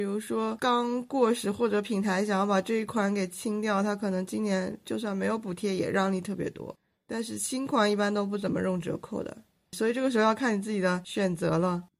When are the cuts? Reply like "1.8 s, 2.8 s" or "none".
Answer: none